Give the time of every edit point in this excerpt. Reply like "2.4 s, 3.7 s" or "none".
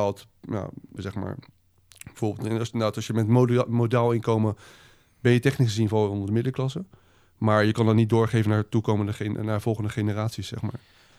1.0 s